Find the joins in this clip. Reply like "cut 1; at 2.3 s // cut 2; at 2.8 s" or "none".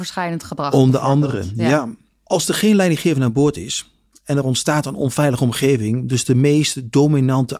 none